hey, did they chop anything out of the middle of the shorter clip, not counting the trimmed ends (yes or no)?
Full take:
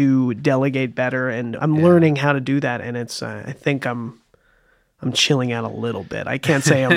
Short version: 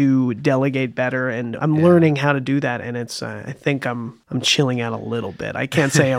yes